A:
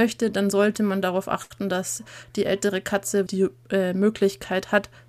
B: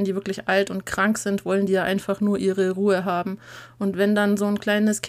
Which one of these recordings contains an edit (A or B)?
A